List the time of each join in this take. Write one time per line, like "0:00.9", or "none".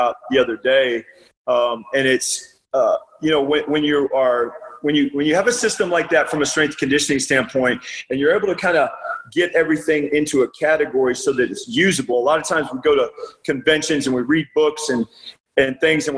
none